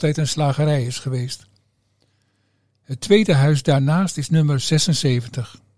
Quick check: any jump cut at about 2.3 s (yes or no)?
no